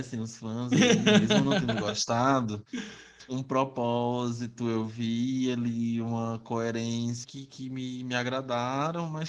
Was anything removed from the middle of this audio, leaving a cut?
yes; 2 cuts; at 3.3 s, 7.2 s

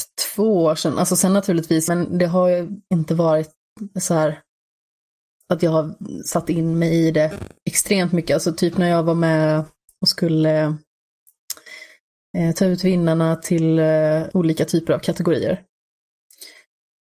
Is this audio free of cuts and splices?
no; 2 cuts; at 1.9 s, 14.3 s

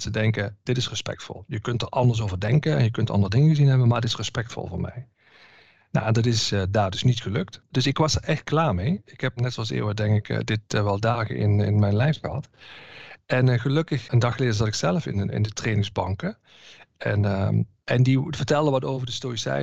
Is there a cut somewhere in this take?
yes; 1 cut; at 9.4 s

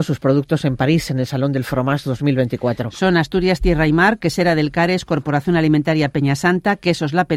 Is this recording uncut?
yes; 0 cuts

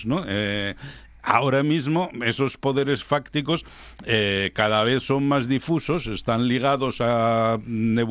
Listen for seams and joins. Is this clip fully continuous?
yes; 0 cuts

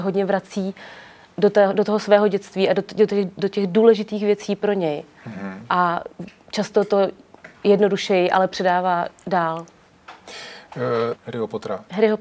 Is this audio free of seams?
no; 1 cut; at 11.1 s

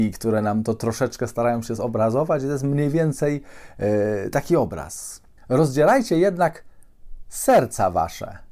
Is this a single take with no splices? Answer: no; 1 cut; at 5.4 s

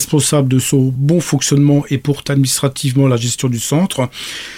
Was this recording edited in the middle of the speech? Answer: no; 0 cuts

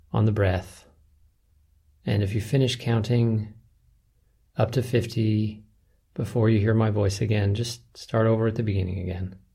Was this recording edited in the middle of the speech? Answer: no; 0 cuts

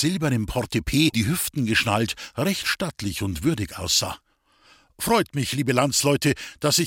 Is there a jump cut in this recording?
yes; 1 cut; at 1.1 s

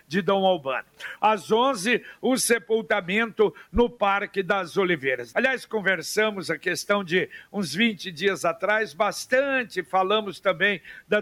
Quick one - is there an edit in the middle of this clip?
yes; 2 cuts; at 1.2 s, 5.3 s

